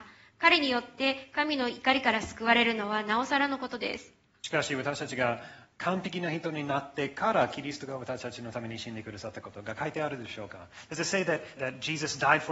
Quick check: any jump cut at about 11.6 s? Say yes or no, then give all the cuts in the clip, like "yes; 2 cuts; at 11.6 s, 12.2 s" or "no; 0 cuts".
yes; 1 cut; at 11.6 s